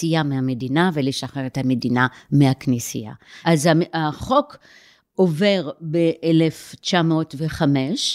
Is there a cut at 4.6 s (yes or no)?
no